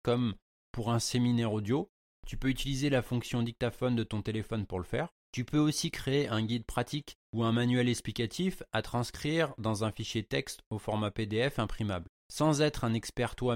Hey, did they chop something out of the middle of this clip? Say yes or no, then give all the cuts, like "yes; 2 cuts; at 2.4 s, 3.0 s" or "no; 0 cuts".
no; 0 cuts